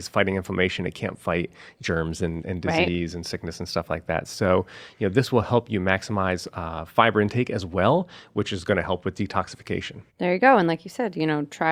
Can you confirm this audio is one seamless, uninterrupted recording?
no; 1 cut; at 10.1 s

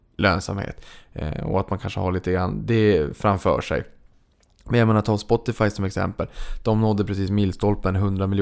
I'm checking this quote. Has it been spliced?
no; 0 cuts

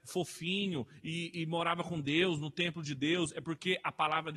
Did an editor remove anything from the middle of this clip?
no; 0 cuts

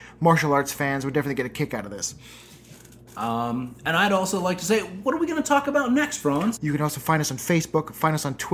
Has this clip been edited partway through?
yes; 1 cut; at 6.6 s

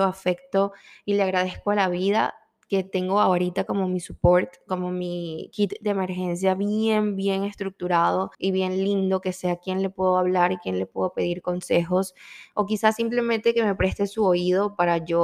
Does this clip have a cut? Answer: yes; 1 cut; at 8.3 s

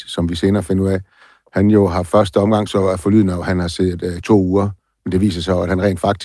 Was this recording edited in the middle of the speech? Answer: yes; 2 cuts; at 2.7 s, 4.2 s

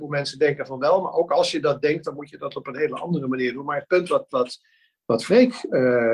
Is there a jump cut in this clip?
no; 0 cuts

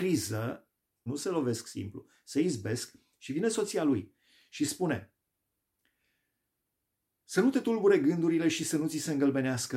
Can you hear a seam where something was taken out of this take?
yes; 1 cut; at 1.1 s

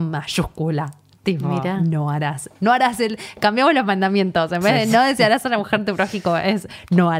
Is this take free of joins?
yes; 0 cuts

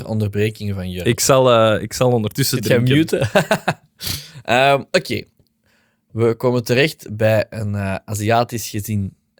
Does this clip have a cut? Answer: no; 0 cuts

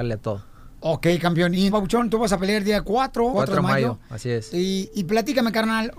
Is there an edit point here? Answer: yes; 2 cuts; at 1.7 s, 3.3 s

